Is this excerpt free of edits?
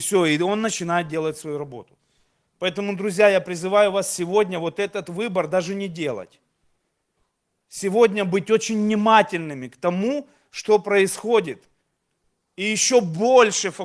yes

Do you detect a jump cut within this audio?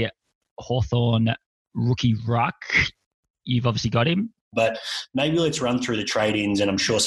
yes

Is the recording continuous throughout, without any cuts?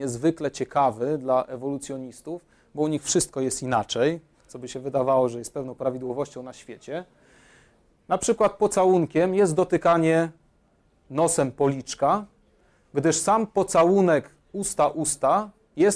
yes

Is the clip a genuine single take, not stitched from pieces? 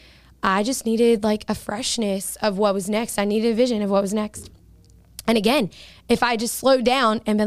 yes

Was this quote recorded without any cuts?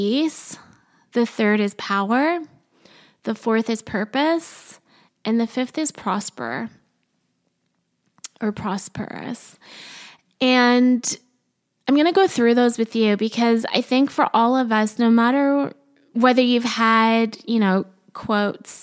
yes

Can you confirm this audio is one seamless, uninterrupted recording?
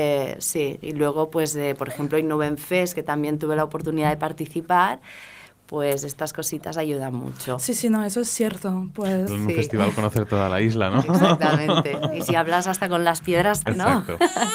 no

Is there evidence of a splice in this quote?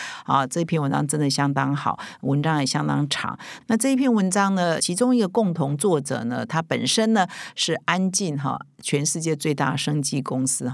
yes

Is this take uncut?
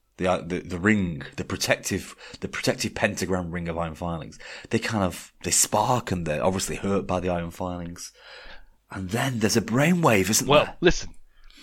yes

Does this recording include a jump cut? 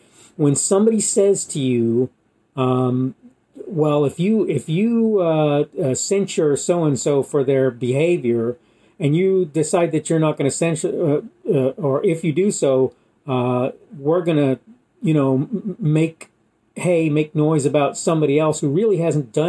no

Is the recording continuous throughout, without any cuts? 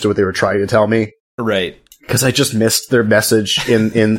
yes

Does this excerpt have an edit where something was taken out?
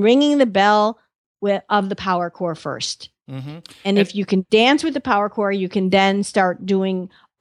no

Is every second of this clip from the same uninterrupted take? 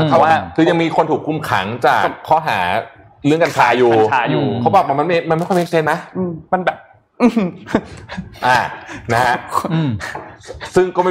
yes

